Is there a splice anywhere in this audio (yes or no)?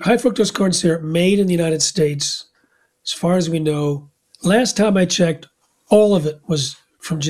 no